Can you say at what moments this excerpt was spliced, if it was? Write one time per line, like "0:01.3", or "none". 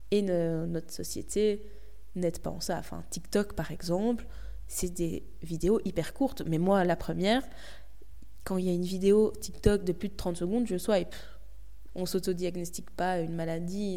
0:11.9